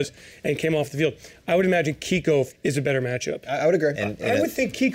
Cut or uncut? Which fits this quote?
cut